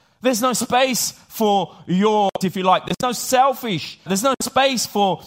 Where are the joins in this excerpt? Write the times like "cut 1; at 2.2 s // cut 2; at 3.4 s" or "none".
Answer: cut 1; at 2.4 s // cut 2; at 4.1 s